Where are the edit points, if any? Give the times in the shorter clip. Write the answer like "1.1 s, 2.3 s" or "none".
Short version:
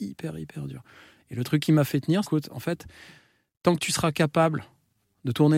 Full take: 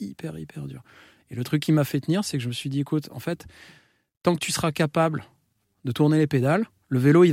2.2 s